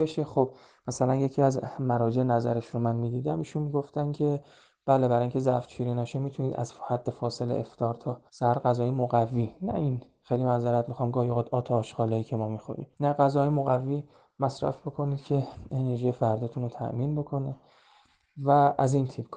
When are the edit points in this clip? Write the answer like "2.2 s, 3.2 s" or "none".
8.3 s, 12.9 s